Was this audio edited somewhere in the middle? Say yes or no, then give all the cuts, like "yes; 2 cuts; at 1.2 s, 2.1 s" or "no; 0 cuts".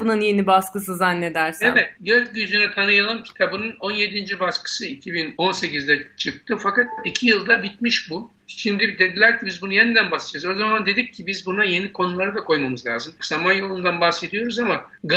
yes; 1 cut; at 13.2 s